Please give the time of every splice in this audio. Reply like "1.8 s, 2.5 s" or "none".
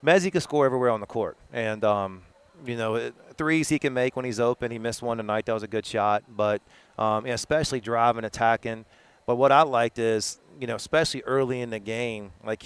none